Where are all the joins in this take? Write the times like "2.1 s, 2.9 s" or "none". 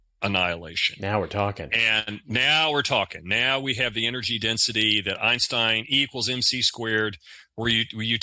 none